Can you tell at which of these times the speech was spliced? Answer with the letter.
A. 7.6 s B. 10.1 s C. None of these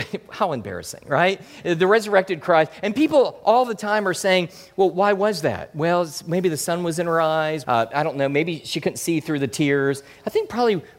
A